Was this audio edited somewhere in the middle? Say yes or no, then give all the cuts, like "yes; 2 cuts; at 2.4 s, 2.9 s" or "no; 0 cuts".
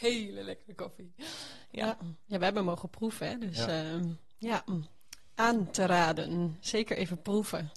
no; 0 cuts